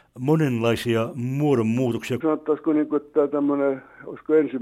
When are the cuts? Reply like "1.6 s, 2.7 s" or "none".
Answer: 2.2 s